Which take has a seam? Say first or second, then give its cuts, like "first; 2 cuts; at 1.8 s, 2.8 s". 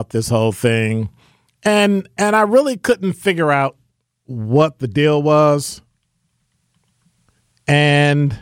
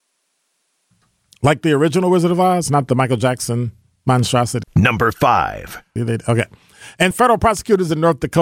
second; 3 cuts; at 4.6 s, 6.0 s, 7.1 s